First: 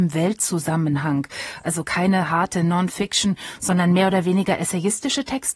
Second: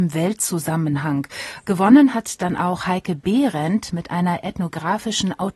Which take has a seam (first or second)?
second